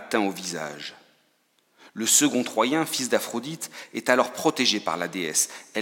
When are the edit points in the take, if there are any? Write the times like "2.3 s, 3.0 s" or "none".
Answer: none